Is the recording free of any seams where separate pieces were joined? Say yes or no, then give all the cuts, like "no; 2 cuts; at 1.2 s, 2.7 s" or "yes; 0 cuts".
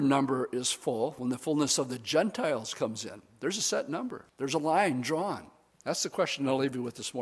no; 2 cuts; at 4.3 s, 5.7 s